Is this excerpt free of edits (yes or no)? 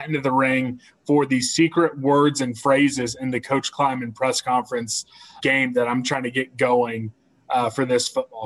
no